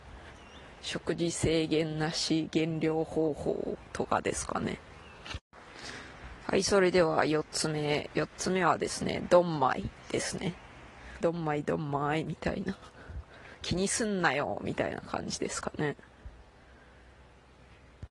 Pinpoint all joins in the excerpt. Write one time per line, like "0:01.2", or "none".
0:11.2